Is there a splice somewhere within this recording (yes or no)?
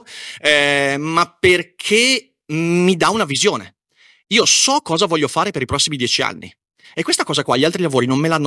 no